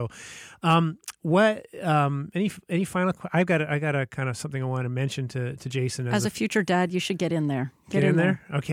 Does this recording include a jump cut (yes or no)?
no